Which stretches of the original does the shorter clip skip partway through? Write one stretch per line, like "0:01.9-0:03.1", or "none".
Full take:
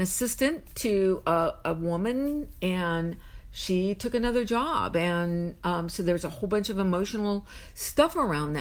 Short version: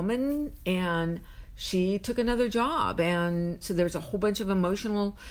0:05.6-0:05.9